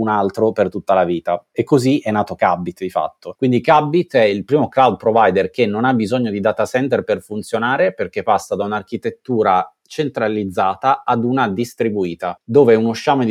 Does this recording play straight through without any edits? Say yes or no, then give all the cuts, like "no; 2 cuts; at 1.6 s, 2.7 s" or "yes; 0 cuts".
yes; 0 cuts